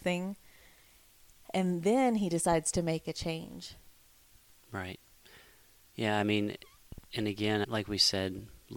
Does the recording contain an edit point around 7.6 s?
yes; 1 cut; at 7.6 s

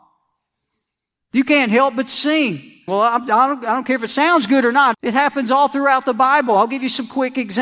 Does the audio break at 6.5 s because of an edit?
no; 2 cuts; at 2.9 s, 4.9 s

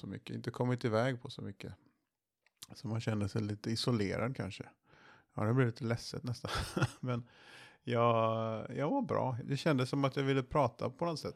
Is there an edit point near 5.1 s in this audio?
no; 1 cut; at 9.4 s

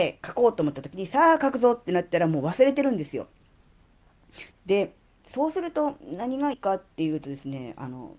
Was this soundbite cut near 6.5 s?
yes; 2 cuts; at 4.5 s, 6.5 s

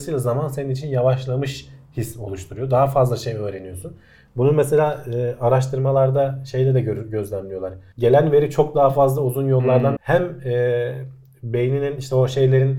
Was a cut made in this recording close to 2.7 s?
no; 2 cuts; at 7.9 s, 10.0 s

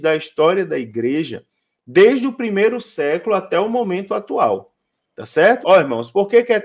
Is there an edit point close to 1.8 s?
no; 1 cut; at 5.6 s

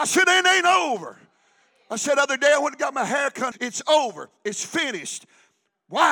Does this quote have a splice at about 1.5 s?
no; 1 cut; at 3.5 s

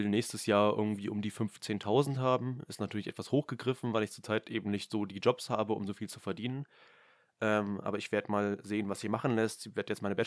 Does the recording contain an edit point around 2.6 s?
no; 0 cuts

